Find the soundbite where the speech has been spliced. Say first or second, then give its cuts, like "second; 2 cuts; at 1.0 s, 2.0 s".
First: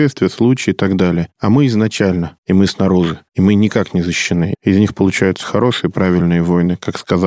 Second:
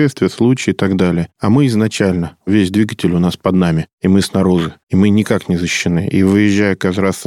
first; 2 cuts; at 2.4 s, 4.5 s